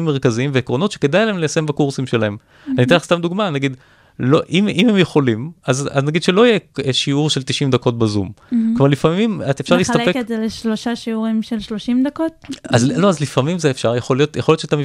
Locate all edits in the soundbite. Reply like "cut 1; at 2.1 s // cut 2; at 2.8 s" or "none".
none